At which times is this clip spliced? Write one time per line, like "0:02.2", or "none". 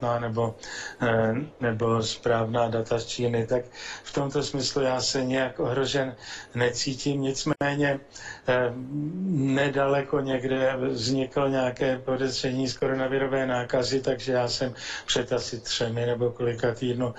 0:03.5